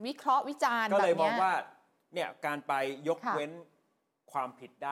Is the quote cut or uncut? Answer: uncut